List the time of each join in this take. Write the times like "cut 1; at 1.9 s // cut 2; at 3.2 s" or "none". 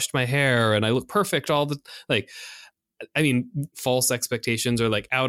cut 1; at 3.7 s